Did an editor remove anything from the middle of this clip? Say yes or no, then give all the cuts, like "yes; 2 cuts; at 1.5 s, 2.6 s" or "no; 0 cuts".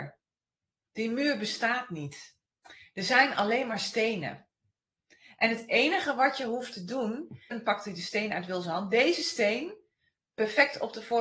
yes; 1 cut; at 7.5 s